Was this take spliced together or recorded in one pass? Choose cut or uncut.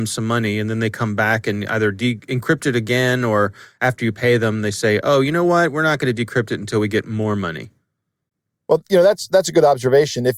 uncut